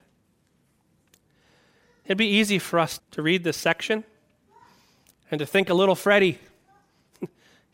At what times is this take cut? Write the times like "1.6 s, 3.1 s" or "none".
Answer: 3.0 s